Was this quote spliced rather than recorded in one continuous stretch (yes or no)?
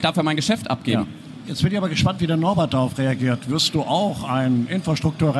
no